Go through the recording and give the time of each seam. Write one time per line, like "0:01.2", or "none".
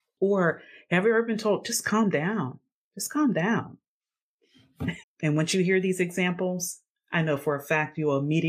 0:05.0